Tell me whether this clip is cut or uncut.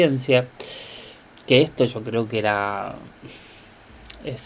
uncut